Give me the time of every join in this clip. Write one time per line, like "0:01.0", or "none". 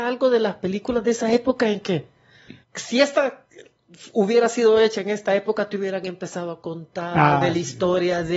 0:02.6